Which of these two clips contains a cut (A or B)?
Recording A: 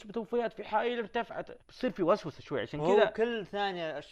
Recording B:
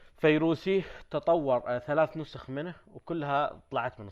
A